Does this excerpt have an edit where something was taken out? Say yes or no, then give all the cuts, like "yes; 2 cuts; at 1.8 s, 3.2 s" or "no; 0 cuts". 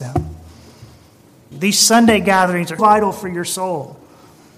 yes; 2 cuts; at 1.5 s, 2.8 s